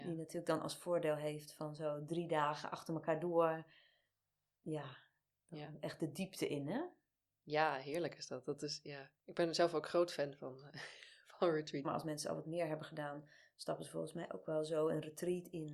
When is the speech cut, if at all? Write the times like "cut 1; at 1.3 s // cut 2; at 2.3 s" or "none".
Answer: cut 1; at 9.2 s // cut 2; at 11.8 s